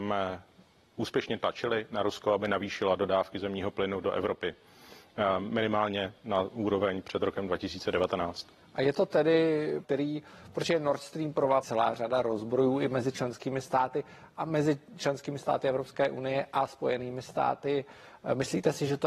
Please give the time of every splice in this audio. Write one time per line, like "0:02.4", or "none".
0:09.8
0:11.6